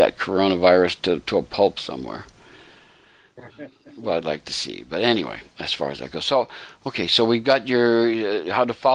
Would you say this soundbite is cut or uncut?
uncut